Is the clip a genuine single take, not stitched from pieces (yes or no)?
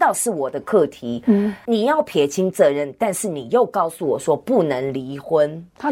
no